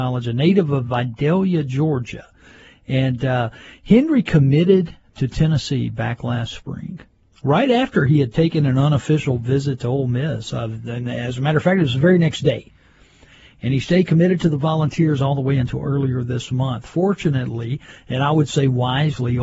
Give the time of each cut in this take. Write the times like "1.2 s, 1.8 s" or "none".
none